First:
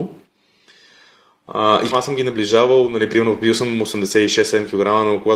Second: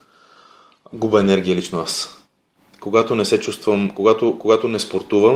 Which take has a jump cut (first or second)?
first